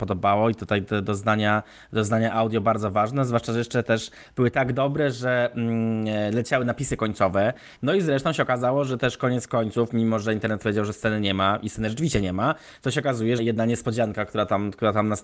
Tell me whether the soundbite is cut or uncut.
cut